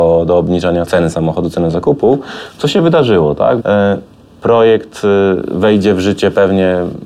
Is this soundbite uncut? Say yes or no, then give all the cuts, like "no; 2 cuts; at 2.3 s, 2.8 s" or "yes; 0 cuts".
no; 1 cut; at 3.6 s